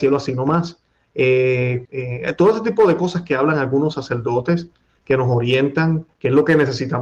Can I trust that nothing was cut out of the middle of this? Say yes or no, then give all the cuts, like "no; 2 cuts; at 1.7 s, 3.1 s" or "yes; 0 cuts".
no; 1 cut; at 1.8 s